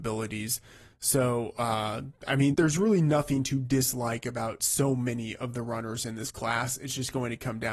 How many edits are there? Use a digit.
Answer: 1